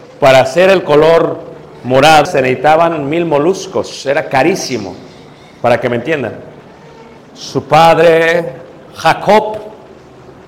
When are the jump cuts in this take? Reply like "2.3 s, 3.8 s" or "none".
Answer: 2.3 s, 7.2 s